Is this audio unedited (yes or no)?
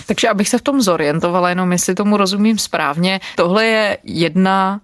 no